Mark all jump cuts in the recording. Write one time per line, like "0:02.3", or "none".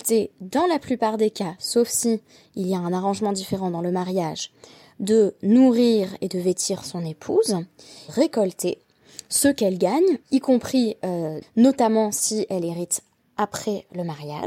0:08.1
0:10.2
0:11.4